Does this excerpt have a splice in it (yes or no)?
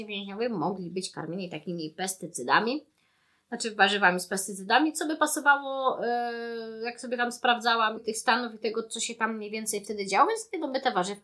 yes